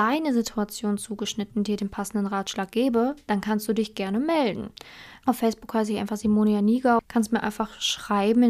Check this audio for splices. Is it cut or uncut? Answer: cut